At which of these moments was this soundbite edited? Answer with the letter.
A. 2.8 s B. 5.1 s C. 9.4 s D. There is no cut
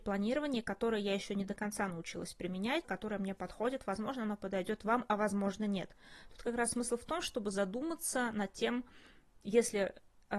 A